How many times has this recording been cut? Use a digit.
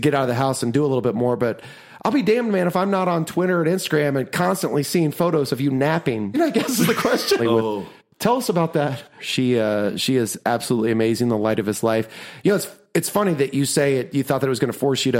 3